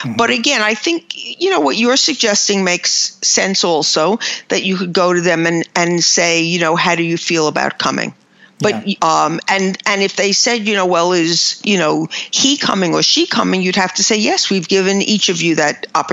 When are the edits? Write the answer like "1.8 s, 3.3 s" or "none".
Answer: 9.0 s